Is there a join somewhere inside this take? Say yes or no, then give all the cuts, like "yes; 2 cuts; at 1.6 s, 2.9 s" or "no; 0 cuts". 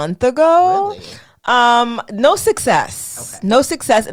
no; 0 cuts